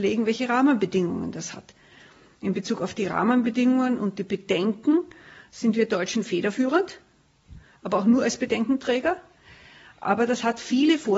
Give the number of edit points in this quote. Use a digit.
0